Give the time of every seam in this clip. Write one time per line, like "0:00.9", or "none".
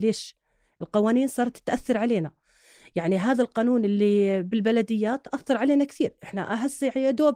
none